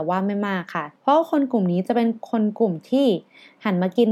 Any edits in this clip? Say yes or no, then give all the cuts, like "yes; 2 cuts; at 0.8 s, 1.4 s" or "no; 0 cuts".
yes; 1 cut; at 1.0 s